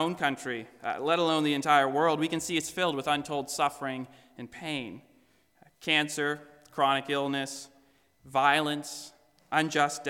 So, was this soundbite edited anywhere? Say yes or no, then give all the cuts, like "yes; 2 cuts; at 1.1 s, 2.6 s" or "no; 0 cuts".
no; 0 cuts